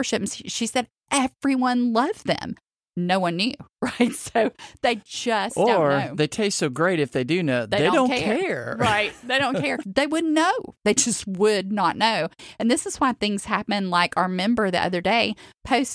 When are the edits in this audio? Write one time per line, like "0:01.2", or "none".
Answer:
0:09.8